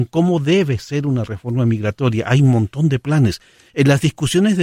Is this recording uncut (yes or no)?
yes